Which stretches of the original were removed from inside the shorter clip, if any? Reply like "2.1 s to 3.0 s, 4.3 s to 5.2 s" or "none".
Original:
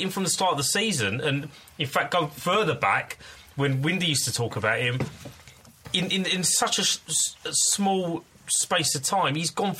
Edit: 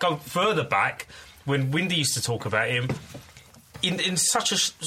6.1 s to 6.2 s